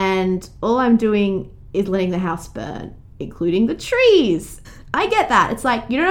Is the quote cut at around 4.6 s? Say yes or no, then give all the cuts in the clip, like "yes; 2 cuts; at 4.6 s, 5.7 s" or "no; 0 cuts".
yes; 1 cut; at 4.6 s